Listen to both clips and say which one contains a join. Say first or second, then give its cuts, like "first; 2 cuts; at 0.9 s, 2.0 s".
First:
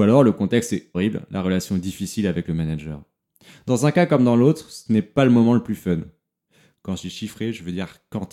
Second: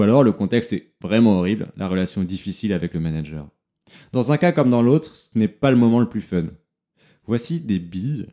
first; 2 cuts; at 0.9 s, 6.7 s